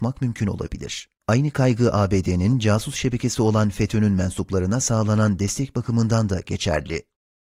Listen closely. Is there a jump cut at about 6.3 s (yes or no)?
no